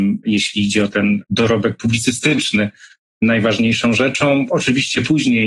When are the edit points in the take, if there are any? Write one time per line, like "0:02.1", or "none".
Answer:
none